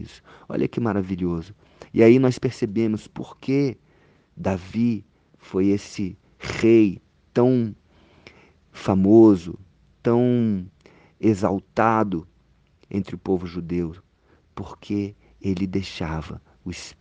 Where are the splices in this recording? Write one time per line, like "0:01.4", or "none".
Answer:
none